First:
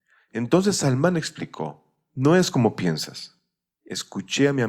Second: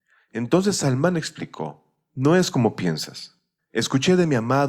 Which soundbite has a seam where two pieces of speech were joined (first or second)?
second